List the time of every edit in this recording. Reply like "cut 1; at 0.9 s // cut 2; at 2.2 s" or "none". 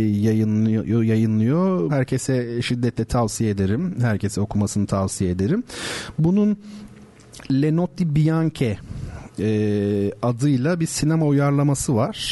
cut 1; at 1.9 s